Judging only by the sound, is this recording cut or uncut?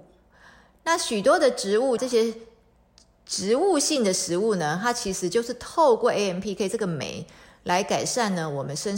cut